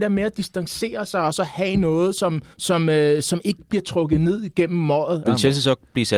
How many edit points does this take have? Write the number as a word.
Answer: two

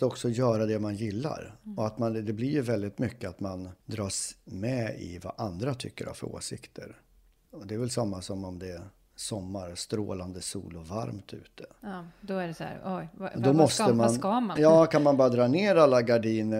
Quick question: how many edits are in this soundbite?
two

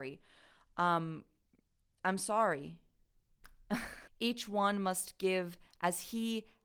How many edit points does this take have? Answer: one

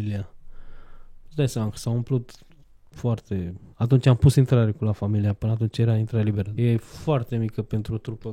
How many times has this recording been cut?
two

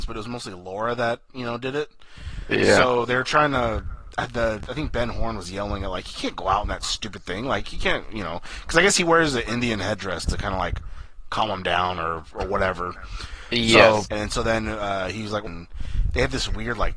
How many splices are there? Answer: two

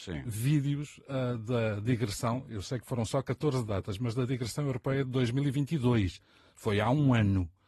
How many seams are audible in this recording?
zero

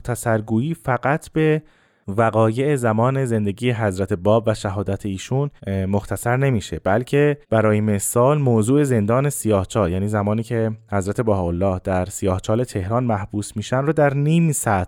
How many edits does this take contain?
two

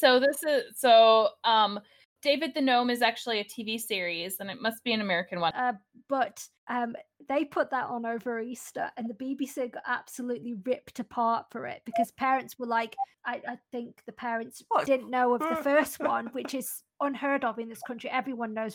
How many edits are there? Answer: two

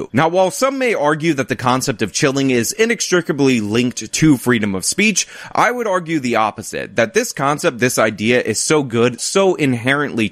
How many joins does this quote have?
one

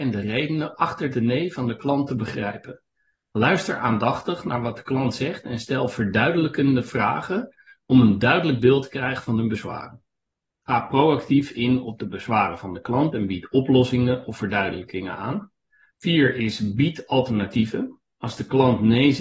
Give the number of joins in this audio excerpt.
two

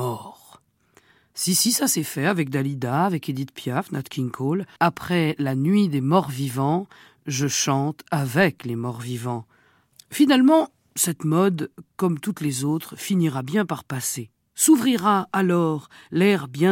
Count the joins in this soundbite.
two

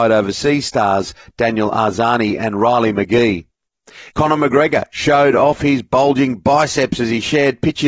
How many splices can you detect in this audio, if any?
one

